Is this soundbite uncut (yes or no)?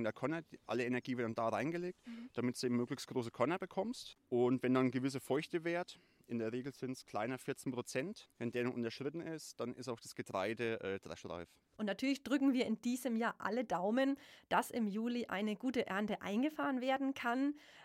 yes